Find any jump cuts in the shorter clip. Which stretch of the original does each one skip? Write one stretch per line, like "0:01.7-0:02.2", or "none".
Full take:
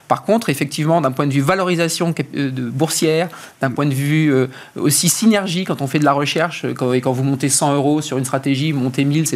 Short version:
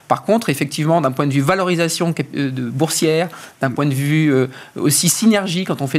none

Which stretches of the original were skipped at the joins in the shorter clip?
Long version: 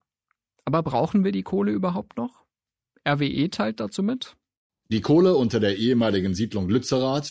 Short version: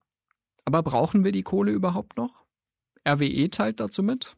none

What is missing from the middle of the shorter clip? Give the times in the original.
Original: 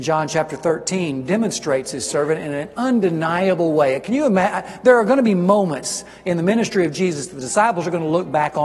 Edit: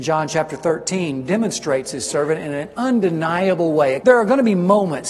0:04.0-0:04.8

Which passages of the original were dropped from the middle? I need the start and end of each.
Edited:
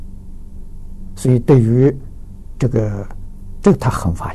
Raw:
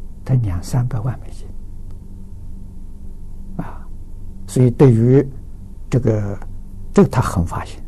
0:03.6-0:04.4

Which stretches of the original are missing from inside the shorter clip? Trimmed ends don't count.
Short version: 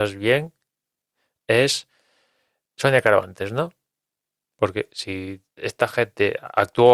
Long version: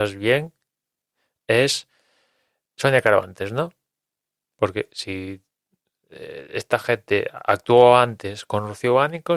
0:05.6-0:06.5

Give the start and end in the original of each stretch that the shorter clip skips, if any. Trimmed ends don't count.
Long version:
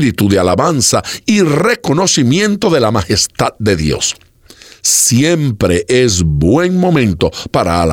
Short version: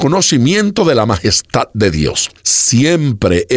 0:04.2-0:04.8

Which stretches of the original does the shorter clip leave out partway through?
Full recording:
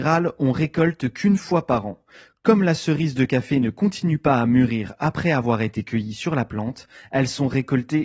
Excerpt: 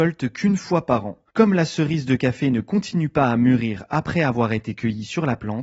0:02.1-0:02.4

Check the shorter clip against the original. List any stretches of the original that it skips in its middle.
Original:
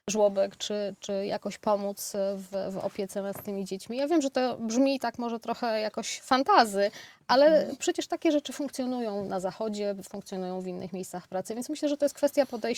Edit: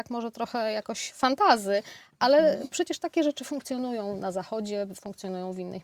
none

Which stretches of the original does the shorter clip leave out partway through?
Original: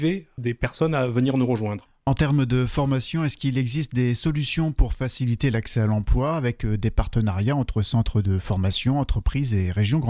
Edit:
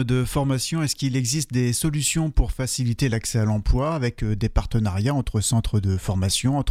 none

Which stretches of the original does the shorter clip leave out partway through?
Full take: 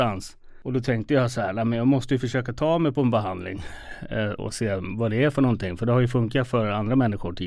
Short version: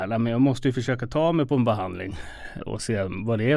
0:04.1-0:04.3

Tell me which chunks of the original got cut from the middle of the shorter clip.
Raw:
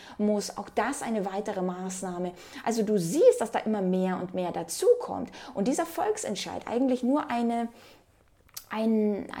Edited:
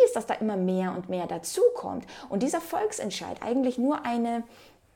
none

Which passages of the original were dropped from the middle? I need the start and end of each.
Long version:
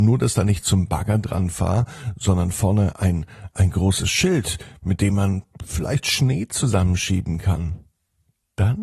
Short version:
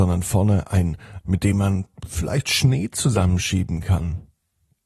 0:03.5-0:04.8

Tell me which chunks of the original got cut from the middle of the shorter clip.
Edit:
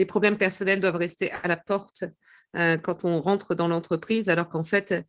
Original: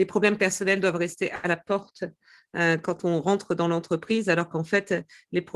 none

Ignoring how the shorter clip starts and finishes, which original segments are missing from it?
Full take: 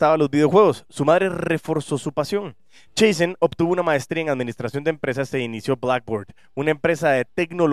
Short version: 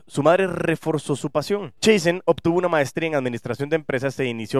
0:02.6-0:02.9

